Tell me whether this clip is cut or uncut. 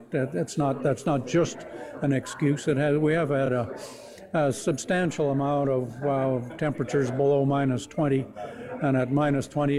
uncut